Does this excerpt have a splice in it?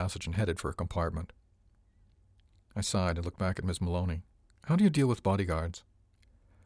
no; 0 cuts

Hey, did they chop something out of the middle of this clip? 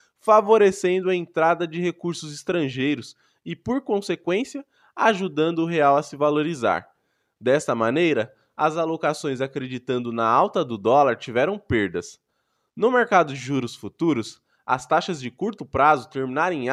no; 0 cuts

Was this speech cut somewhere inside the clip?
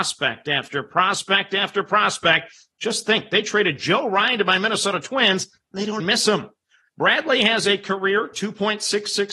yes; 1 cut; at 6.0 s

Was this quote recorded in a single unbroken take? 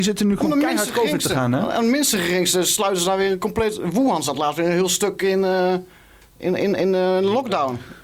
yes; 0 cuts

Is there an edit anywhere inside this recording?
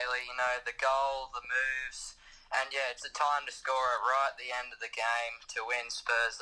yes; 1 cut; at 3.0 s

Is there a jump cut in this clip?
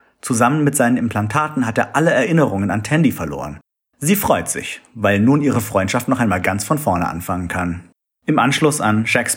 no; 0 cuts

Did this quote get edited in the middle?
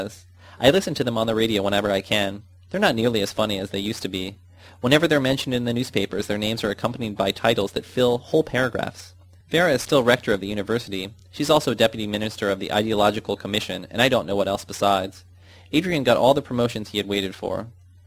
no; 0 cuts

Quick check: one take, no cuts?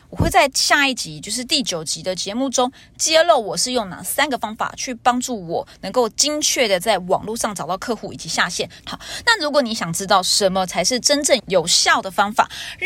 no; 2 cuts; at 8.8 s, 11.4 s

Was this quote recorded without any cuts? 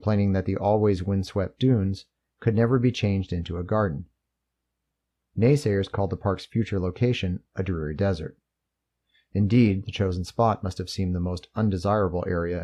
yes; 0 cuts

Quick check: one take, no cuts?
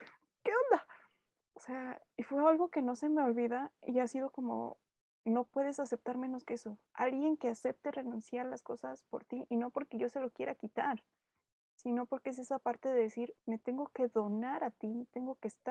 no; 1 cut; at 13.4 s

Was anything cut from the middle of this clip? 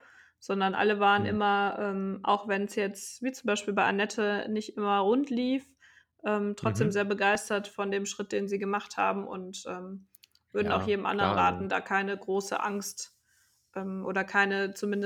no; 0 cuts

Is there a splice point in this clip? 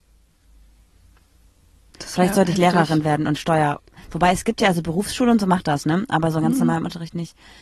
yes; 1 cut; at 1.9 s

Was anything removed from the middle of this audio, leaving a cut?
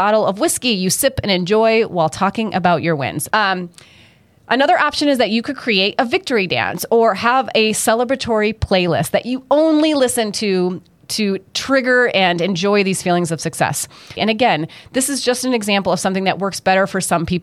yes; 2 cuts; at 3.3 s, 14.2 s

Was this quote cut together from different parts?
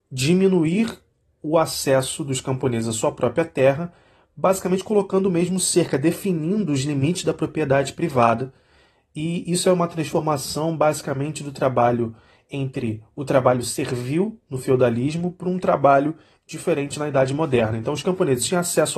no; 0 cuts

